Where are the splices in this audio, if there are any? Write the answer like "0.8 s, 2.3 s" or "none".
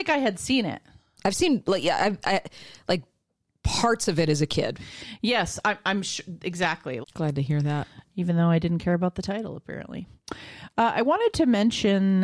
7.0 s